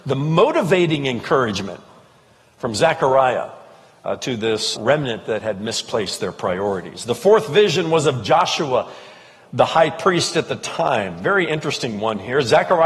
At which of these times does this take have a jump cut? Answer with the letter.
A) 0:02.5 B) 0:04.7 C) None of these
B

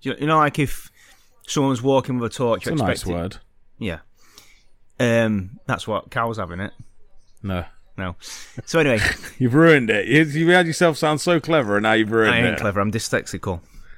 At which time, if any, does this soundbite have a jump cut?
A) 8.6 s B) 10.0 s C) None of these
C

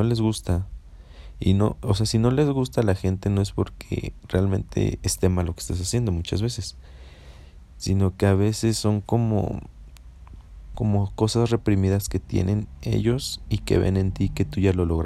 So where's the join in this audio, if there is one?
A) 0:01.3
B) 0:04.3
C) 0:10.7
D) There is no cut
C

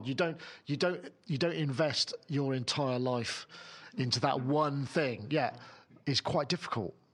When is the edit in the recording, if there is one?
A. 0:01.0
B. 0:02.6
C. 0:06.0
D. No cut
C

